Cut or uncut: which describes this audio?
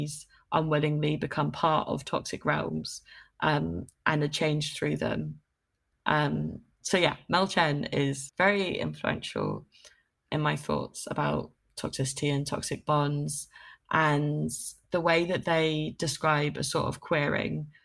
cut